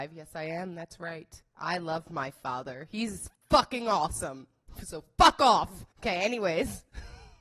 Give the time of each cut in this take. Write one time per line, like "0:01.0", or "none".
0:05.9